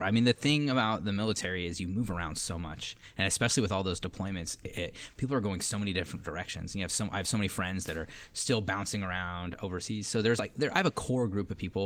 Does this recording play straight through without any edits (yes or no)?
yes